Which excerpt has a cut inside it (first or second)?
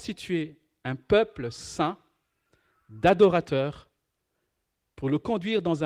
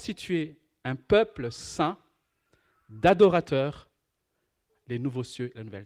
second